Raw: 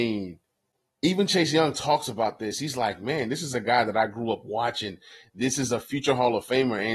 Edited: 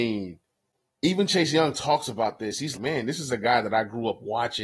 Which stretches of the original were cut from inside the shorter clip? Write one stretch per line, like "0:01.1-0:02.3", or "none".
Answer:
0:02.7-0:03.0